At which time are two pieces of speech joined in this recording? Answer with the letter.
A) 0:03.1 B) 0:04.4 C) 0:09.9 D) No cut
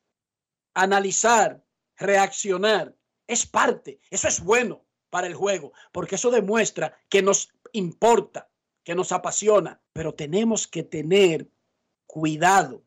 C